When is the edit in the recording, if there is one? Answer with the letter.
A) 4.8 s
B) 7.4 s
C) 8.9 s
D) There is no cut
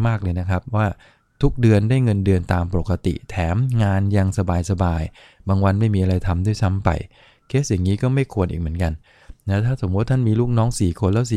D